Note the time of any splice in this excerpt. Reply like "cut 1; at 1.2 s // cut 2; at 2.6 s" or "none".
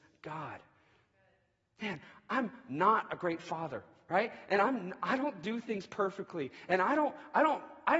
none